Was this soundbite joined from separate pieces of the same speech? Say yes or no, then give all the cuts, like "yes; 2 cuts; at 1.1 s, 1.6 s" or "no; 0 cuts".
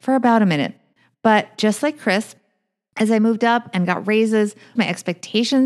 yes; 1 cut; at 4.8 s